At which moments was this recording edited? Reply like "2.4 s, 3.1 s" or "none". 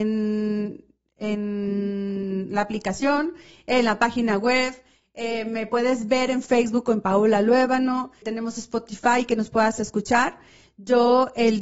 8.2 s

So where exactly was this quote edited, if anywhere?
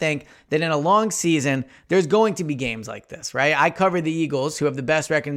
none

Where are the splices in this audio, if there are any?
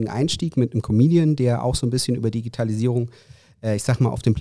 none

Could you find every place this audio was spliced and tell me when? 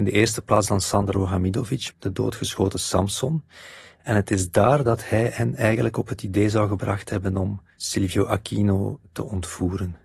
1.9 s

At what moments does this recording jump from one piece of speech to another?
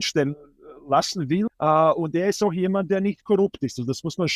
1.5 s

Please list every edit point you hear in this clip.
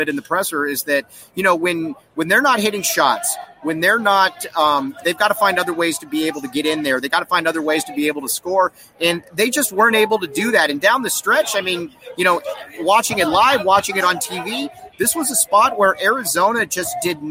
5.0 s

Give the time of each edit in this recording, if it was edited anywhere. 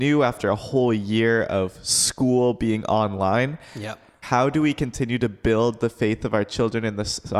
4.2 s

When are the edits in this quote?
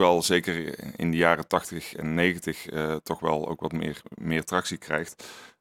none

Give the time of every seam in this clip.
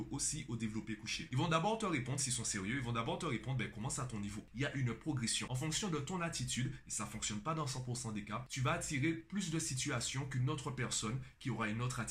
5.5 s

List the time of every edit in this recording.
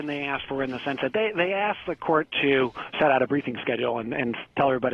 none

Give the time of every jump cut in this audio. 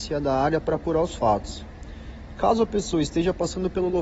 none

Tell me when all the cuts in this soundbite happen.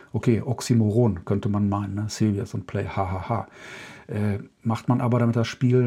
none

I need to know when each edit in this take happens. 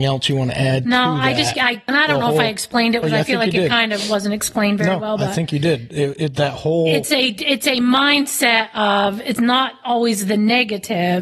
3.0 s

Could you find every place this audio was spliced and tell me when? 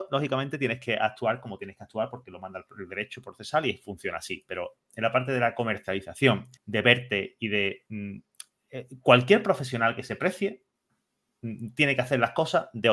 6.6 s

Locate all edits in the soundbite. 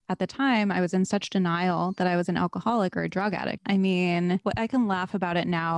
3.6 s

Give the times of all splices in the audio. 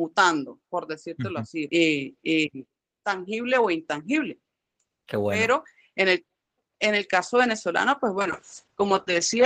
1.7 s

